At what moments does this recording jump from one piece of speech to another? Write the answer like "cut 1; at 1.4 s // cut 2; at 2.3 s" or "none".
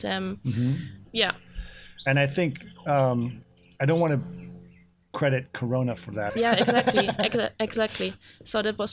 cut 1; at 1.0 s // cut 2; at 6.3 s